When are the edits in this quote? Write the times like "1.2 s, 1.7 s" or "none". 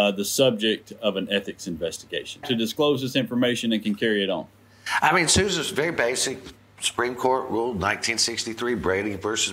2.4 s